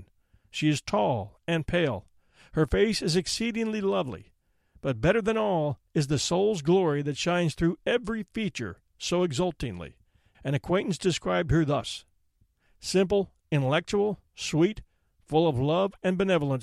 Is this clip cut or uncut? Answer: cut